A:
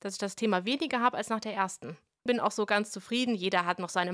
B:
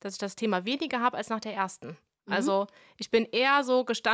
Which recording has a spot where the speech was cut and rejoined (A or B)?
A